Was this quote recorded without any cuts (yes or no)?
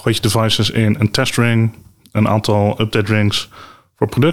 no